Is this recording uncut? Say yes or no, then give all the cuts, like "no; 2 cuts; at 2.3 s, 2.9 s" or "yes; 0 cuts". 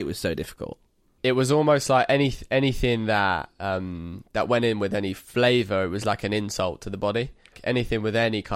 yes; 0 cuts